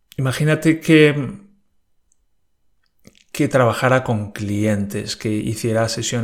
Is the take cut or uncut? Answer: uncut